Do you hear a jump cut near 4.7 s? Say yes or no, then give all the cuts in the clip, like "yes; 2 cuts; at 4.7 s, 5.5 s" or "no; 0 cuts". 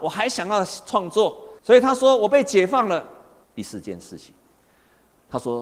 no; 2 cuts; at 1.6 s, 3.4 s